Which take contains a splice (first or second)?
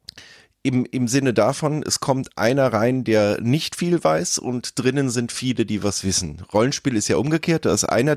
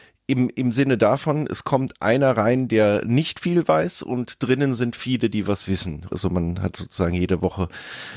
second